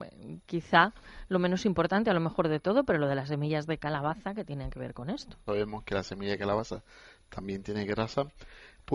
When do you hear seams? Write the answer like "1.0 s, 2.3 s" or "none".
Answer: 5.5 s